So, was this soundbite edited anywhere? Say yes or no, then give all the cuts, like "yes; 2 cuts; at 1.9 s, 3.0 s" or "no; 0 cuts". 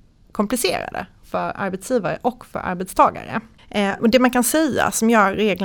no; 0 cuts